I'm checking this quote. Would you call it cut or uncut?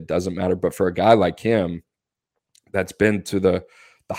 uncut